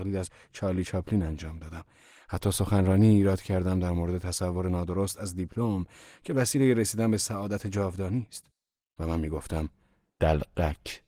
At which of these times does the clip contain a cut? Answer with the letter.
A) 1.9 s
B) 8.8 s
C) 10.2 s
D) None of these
B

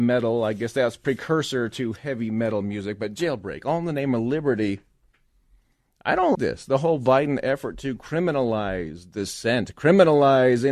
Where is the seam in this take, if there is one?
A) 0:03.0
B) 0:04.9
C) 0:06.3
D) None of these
C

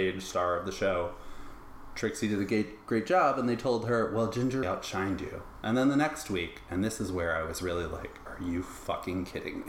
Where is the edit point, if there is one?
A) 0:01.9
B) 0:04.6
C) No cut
B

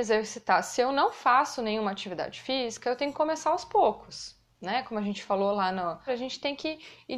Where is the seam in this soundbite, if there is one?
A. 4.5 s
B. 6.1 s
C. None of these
B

